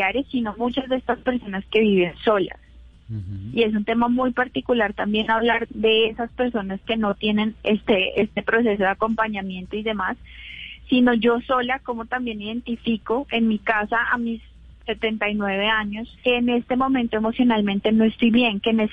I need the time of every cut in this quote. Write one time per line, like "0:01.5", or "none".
0:05.6
0:16.2